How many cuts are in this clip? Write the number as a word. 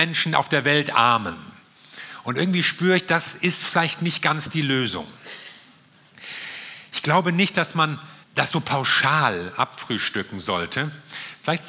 one